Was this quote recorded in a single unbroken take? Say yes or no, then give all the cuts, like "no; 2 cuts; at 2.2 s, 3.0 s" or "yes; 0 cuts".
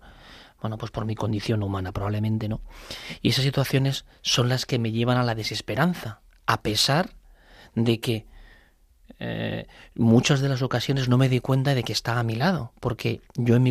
yes; 0 cuts